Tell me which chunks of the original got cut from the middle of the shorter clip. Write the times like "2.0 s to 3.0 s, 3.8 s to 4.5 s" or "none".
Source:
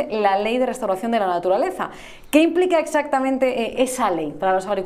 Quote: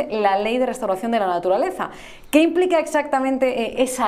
none